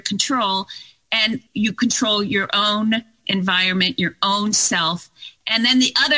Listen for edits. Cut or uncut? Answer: cut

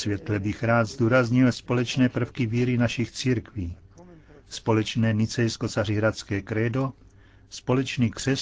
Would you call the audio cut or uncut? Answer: uncut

